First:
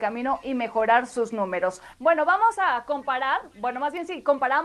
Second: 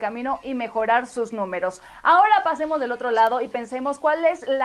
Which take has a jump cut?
first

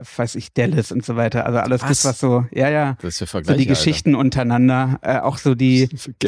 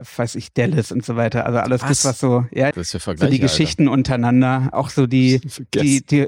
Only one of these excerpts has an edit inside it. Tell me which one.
second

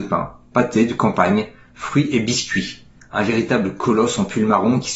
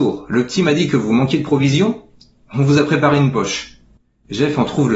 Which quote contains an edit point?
first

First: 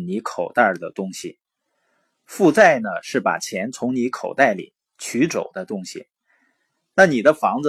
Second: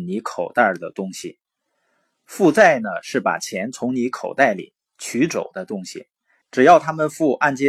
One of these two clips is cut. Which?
second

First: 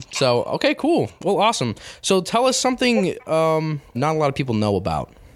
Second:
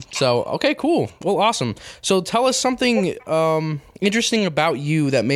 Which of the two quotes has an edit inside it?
first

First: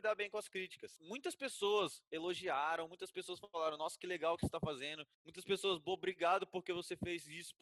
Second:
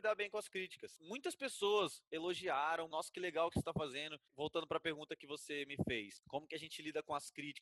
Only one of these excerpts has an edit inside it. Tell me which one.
second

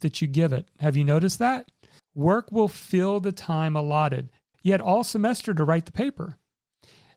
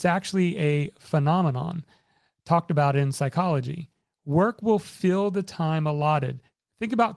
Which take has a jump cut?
first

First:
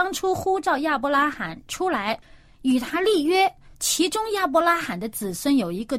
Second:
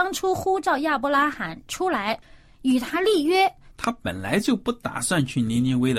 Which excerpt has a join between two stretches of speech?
second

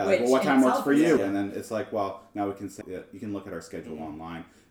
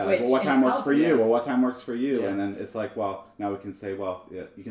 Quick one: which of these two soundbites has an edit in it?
first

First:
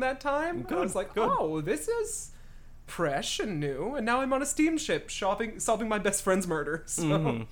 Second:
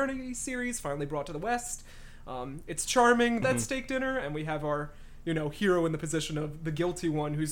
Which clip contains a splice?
second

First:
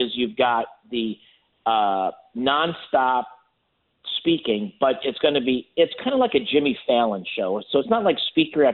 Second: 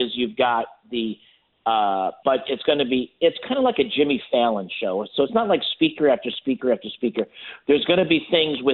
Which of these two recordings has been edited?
second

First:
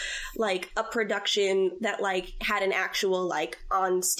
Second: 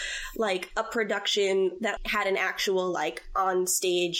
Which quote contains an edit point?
second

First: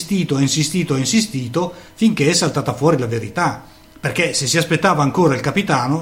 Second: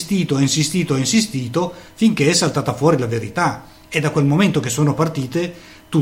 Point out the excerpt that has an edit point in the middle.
first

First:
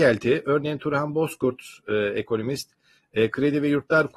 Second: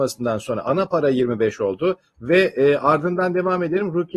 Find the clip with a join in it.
second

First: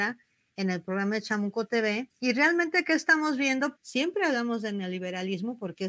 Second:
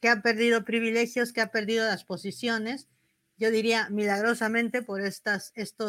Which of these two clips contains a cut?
first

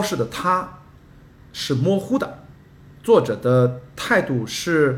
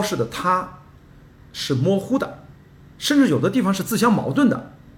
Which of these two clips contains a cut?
second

